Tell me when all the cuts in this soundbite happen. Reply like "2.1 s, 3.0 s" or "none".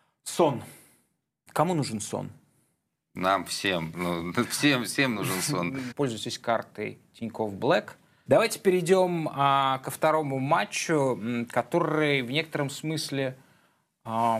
5.9 s, 8.3 s